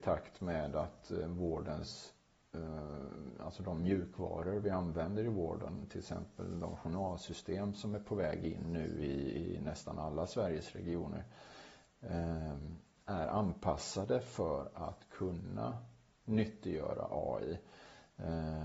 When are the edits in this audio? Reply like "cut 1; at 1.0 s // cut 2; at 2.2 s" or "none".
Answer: none